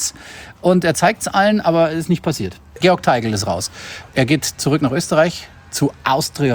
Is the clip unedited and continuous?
no; 1 cut; at 2.8 s

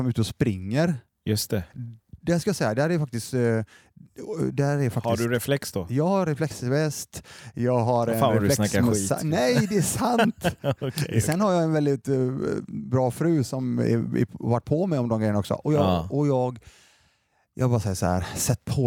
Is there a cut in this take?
no; 0 cuts

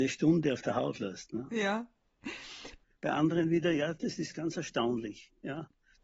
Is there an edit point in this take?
yes; 1 cut; at 2.8 s

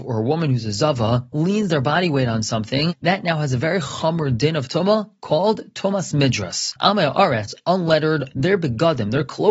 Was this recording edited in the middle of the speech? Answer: yes; 2 cuts; at 6.8 s, 8.3 s

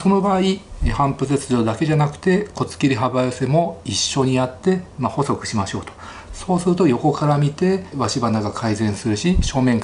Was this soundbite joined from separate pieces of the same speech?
yes; 1 cut; at 7.9 s

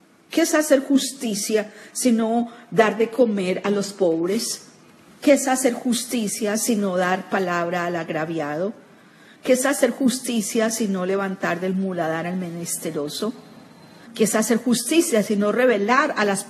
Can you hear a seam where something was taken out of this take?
yes; 1 cut; at 14.1 s

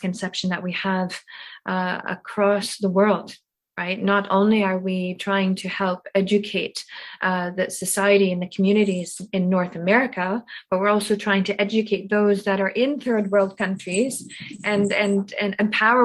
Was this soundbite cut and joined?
no; 0 cuts

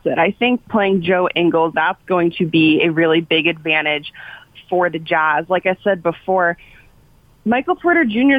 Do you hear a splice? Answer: yes; 1 cut; at 1.7 s

